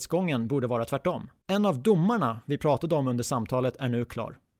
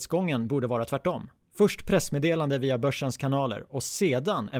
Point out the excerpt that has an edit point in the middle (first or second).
first